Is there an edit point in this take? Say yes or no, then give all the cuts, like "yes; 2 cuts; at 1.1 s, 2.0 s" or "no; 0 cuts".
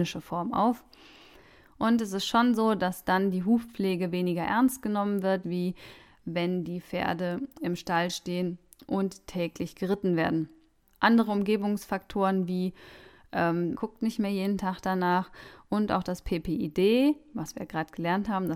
yes; 2 cuts; at 5.4 s, 13.7 s